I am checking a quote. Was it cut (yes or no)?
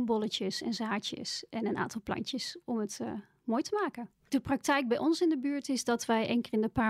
yes